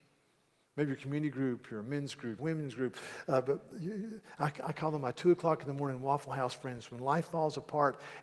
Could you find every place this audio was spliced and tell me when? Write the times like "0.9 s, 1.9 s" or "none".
2.4 s